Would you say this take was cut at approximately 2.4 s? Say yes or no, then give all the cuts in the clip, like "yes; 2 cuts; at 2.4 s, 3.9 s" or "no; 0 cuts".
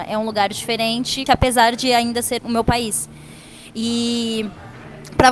yes; 2 cuts; at 1.3 s, 2.4 s